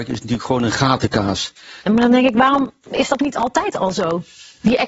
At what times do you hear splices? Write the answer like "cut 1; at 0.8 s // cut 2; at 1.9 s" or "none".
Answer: cut 1; at 1.9 s